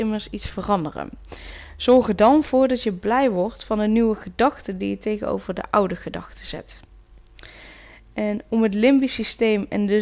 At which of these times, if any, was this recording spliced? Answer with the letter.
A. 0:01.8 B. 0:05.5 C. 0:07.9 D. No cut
D